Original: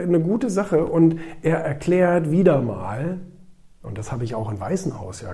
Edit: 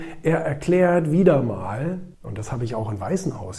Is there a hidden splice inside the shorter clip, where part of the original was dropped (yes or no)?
yes